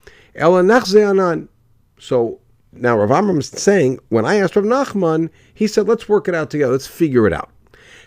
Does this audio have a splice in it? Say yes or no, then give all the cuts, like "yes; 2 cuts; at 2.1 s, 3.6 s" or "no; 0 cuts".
no; 0 cuts